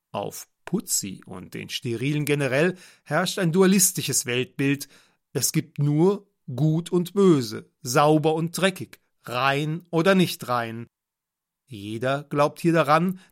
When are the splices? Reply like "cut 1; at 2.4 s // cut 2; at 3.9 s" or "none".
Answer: cut 1; at 11.7 s